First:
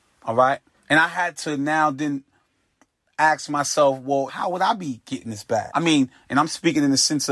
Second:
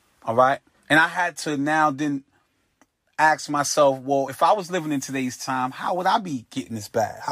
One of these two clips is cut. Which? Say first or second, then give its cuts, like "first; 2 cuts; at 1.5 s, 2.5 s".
first; 2 cuts; at 4.3 s, 5.7 s